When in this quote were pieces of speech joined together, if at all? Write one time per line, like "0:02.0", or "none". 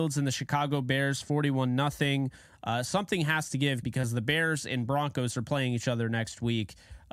0:03.8

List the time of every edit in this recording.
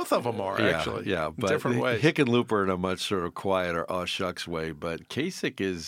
none

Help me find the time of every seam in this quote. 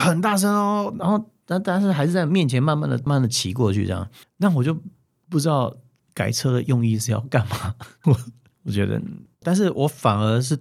0:03.1
0:08.0

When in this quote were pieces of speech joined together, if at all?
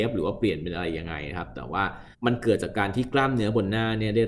0:02.1

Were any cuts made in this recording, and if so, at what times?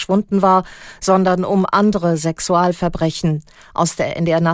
none

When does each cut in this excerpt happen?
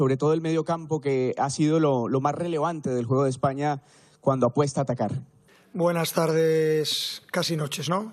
none

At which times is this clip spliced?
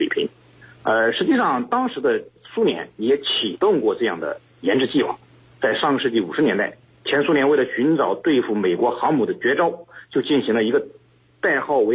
none

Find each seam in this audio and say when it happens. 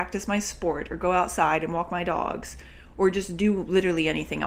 none

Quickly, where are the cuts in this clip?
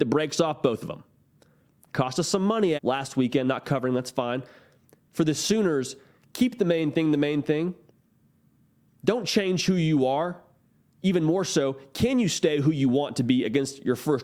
0:02.8

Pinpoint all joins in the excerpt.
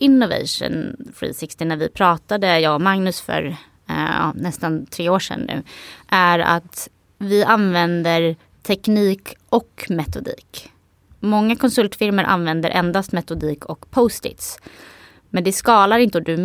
none

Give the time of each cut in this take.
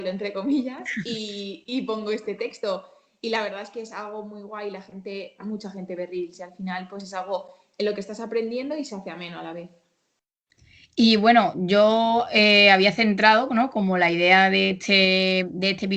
none

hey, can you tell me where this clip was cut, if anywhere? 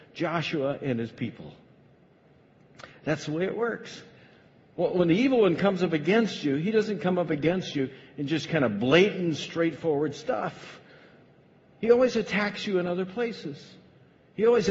none

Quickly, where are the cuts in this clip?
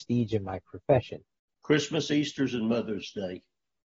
0:01.5

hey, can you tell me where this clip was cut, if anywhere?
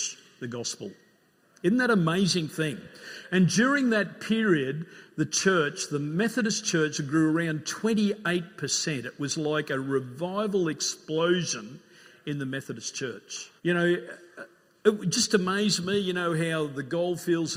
0:13.6

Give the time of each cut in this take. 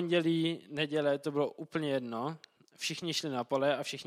none

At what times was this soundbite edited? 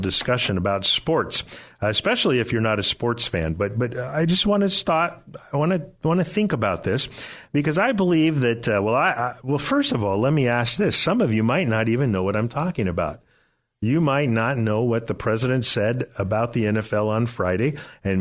none

